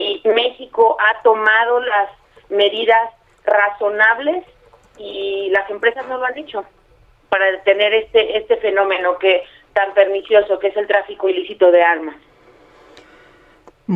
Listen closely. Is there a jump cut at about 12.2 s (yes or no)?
no